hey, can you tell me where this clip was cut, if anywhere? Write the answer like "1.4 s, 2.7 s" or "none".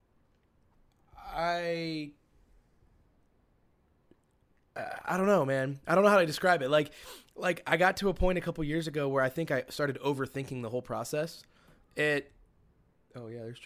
11.9 s